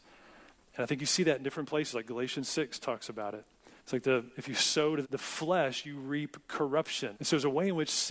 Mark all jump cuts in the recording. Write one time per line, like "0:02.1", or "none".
0:03.8
0:05.0
0:07.1